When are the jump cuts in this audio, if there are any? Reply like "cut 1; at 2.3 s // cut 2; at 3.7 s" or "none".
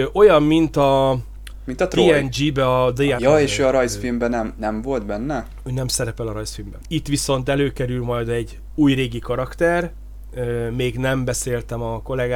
cut 1; at 3.2 s // cut 2; at 6.8 s